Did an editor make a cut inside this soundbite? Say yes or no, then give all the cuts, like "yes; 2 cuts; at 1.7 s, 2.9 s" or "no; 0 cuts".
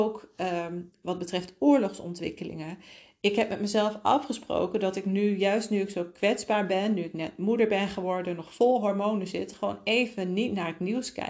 no; 0 cuts